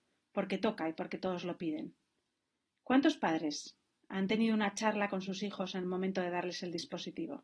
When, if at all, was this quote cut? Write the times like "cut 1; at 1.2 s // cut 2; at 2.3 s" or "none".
none